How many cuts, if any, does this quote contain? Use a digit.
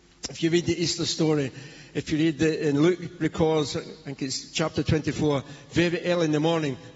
0